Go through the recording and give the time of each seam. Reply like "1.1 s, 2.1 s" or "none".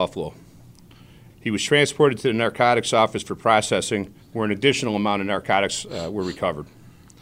1.3 s, 4.2 s

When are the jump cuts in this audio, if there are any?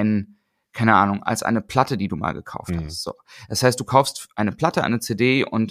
none

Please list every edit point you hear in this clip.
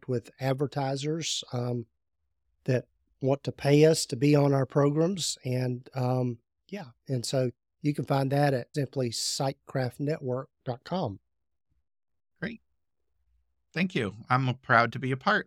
8.7 s

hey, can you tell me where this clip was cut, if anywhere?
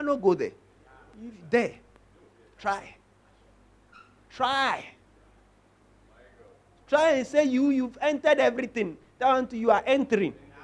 none

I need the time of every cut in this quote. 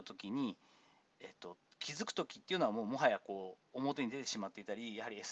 none

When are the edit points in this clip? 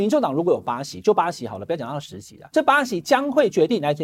none

